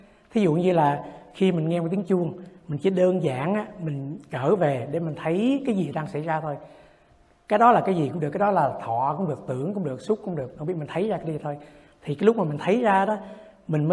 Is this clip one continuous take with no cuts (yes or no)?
yes